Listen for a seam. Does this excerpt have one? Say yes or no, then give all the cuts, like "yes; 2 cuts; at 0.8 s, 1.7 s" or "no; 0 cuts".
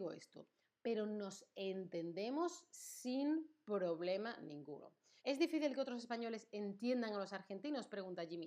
yes; 1 cut; at 5.2 s